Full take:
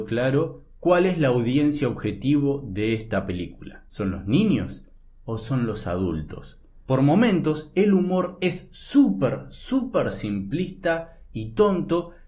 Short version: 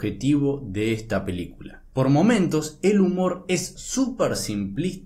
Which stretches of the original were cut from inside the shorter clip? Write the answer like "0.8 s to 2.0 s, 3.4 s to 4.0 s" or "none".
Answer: 3.9 s to 6.8 s, 8.7 s to 9.5 s